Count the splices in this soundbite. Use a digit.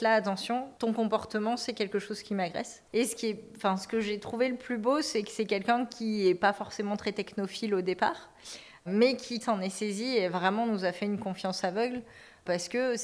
2